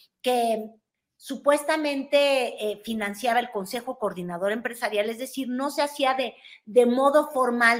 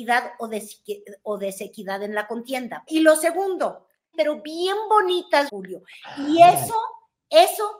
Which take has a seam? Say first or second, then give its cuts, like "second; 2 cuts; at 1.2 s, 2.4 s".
second; 3 cuts; at 2.9 s, 4.1 s, 5.5 s